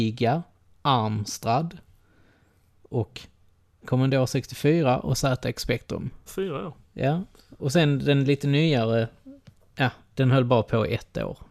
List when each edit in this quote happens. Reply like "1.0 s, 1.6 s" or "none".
3.8 s, 6.3 s